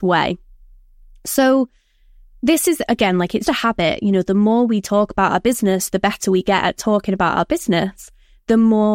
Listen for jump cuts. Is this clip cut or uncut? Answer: cut